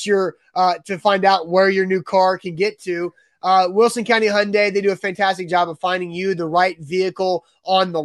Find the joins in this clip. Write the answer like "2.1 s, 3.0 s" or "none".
none